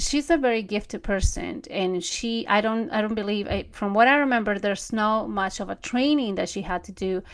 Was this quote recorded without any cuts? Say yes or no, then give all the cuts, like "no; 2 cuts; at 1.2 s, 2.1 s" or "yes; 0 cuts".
yes; 0 cuts